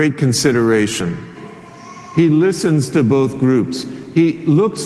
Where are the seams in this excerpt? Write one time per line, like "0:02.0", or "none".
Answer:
none